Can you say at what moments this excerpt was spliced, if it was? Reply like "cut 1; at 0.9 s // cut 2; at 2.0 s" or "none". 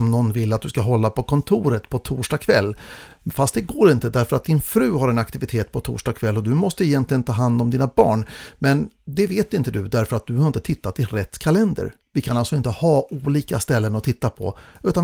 none